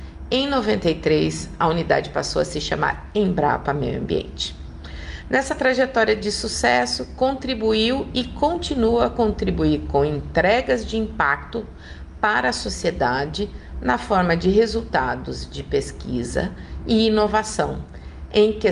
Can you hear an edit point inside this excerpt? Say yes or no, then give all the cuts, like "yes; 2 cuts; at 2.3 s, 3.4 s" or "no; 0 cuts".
no; 0 cuts